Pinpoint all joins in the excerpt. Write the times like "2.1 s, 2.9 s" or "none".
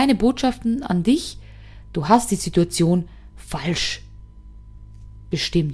none